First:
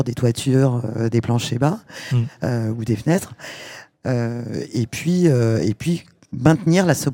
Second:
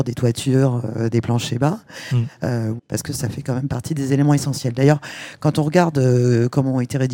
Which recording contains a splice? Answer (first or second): second